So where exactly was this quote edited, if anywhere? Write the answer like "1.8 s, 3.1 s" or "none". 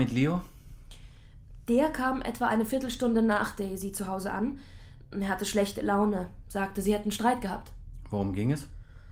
none